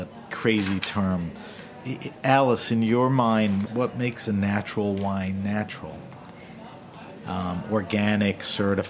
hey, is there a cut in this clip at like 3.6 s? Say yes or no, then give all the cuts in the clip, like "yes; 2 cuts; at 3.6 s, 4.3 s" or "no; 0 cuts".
yes; 2 cuts; at 3.6 s, 7.2 s